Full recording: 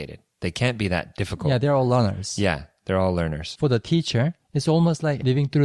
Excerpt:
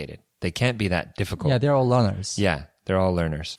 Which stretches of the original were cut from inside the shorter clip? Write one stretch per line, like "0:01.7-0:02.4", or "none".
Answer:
none

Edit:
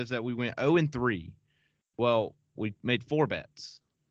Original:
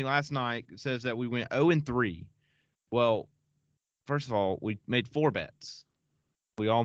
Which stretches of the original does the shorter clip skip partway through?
0:03.5-0:04.6

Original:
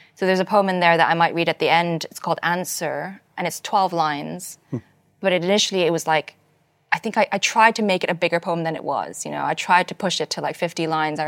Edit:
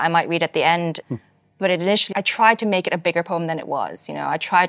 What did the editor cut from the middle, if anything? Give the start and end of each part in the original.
0:02.1-0:04.6
0:05.7-0:07.3

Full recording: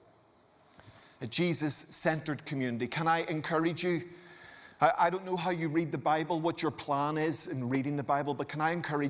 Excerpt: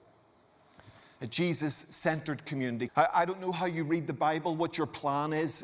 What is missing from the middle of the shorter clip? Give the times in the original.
0:02.9-0:04.7

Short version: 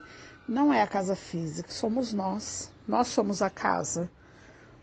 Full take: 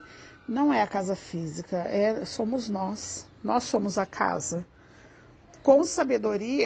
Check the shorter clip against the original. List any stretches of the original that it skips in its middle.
0:01.7-0:02.3

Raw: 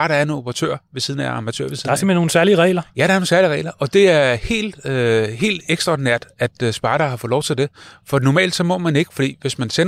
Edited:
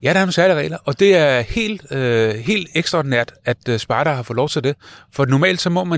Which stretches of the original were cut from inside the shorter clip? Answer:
none

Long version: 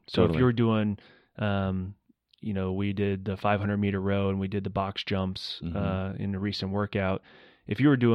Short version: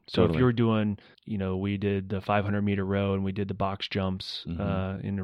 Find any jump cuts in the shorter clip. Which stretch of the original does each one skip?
0:01.1-0:02.3

